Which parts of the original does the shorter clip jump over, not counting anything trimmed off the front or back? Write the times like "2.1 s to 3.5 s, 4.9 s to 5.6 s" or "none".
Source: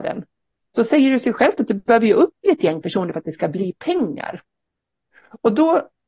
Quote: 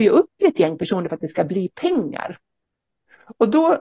none